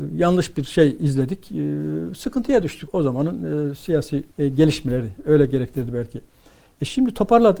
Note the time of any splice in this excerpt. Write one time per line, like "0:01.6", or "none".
0:02.9
0:04.3